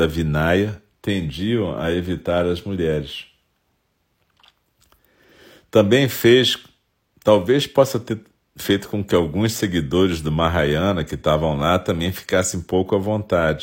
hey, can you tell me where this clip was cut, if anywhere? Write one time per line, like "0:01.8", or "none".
0:00.9